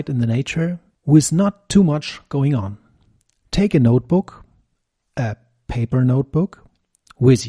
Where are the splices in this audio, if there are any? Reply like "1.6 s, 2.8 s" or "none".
3.5 s